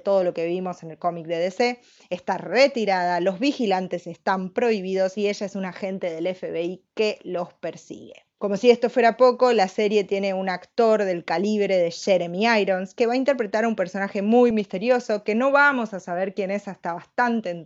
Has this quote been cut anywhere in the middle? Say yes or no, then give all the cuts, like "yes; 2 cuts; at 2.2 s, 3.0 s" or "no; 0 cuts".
yes; 1 cut; at 14.5 s